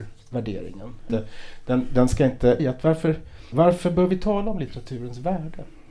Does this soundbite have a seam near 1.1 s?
yes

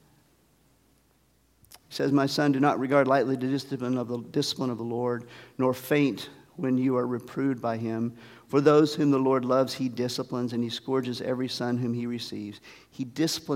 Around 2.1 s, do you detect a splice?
no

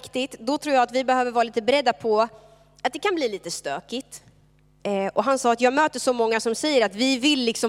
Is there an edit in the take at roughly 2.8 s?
no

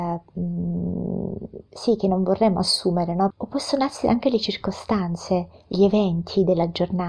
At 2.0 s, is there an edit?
no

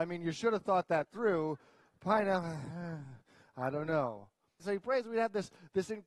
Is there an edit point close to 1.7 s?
no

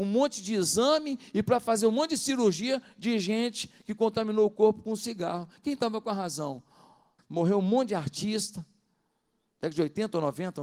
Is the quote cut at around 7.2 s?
yes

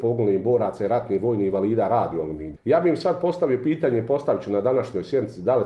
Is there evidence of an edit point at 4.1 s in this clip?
no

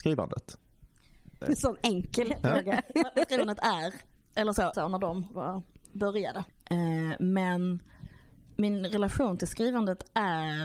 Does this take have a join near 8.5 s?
no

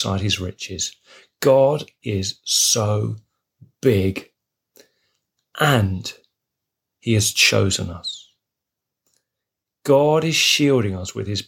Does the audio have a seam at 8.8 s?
no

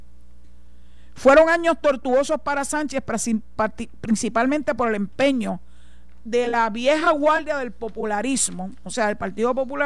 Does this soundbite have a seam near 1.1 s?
no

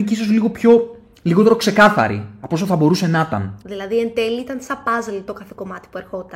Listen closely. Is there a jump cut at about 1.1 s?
no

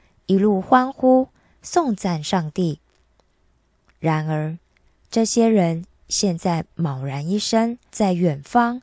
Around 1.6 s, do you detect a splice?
no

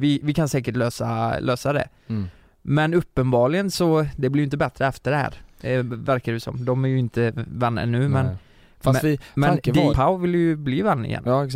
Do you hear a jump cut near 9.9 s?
yes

